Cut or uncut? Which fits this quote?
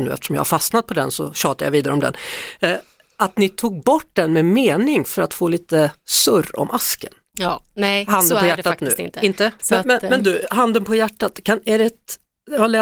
cut